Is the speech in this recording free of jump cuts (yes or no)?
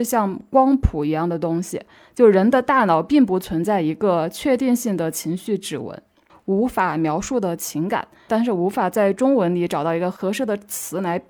no